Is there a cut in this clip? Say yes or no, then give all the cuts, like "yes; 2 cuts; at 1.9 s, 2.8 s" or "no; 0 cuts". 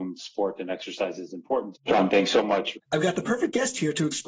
yes; 2 cuts; at 1.7 s, 2.7 s